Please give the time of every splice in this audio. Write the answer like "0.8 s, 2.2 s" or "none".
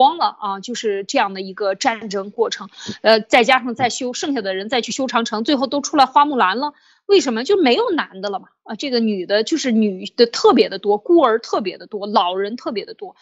none